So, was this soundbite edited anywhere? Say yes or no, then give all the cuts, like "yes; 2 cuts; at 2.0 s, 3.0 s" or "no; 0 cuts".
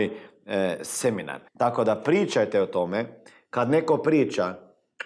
yes; 1 cut; at 1.5 s